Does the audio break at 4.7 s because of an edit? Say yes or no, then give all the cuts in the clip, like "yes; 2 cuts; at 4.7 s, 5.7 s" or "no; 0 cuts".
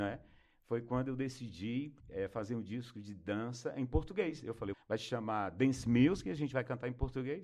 yes; 2 cuts; at 2.0 s, 4.7 s